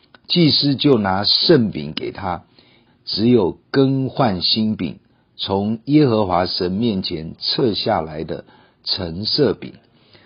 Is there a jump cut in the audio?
yes; 1 cut; at 2.9 s

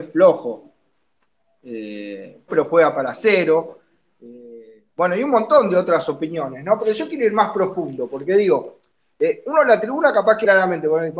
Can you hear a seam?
yes; 1 cut; at 2.5 s

